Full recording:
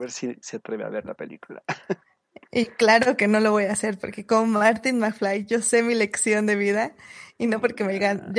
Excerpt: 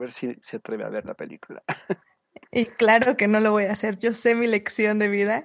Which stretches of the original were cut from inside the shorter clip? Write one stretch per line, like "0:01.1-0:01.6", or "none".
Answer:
0:04.0-0:05.5